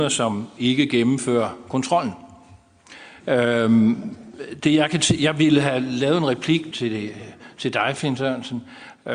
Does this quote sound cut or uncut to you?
cut